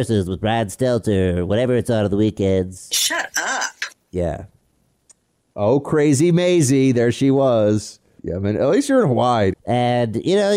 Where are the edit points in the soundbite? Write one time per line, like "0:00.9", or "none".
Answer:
0:08.2
0:09.5